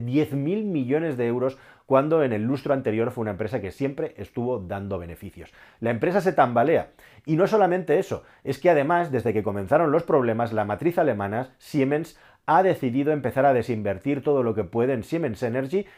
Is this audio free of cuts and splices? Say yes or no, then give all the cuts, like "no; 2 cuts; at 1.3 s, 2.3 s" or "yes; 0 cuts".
yes; 0 cuts